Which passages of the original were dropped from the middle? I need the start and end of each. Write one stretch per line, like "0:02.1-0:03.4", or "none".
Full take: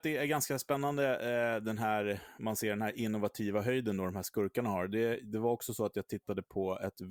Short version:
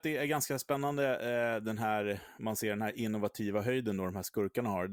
none